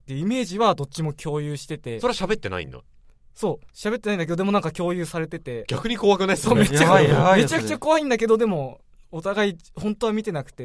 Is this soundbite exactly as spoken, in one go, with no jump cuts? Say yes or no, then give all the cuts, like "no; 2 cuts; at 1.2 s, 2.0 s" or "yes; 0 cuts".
yes; 0 cuts